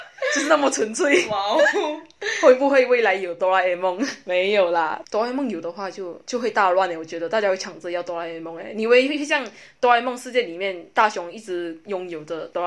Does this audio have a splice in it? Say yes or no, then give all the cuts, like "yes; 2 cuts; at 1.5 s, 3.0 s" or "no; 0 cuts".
no; 0 cuts